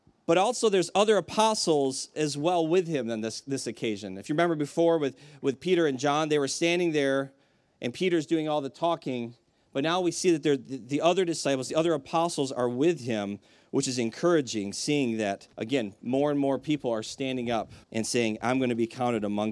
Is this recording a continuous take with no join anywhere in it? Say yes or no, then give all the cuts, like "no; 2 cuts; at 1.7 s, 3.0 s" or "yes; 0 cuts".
no; 2 cuts; at 15.5 s, 17.8 s